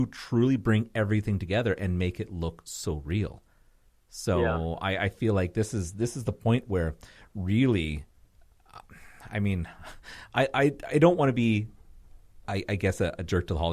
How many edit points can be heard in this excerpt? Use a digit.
0